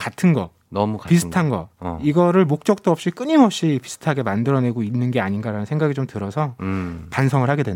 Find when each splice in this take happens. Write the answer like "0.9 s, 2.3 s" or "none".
none